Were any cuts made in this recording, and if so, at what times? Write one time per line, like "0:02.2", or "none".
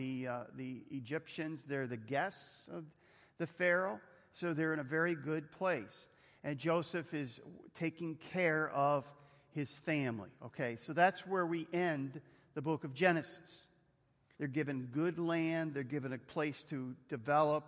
0:14.4